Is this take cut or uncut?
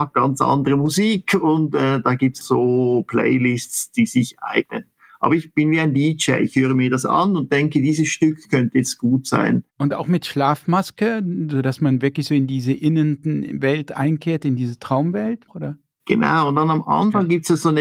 cut